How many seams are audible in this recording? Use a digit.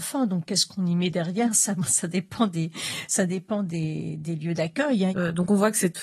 1